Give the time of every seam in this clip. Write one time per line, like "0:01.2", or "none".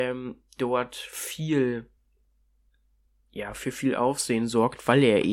none